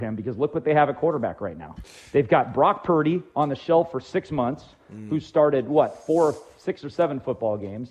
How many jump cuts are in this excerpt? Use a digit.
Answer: 0